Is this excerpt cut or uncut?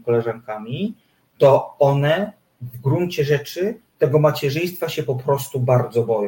uncut